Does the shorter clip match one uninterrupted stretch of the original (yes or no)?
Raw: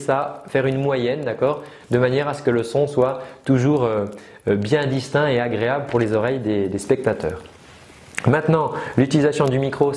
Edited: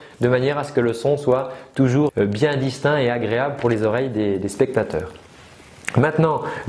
no